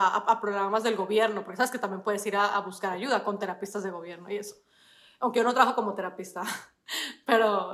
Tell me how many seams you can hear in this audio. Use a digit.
0